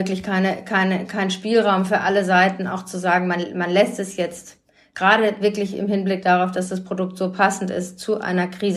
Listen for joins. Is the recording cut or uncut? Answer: uncut